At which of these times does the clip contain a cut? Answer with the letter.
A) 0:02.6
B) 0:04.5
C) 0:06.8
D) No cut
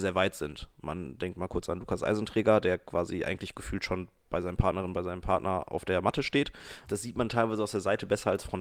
C